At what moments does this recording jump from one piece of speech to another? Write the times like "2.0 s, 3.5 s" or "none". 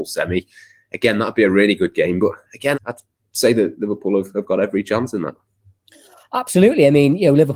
2.7 s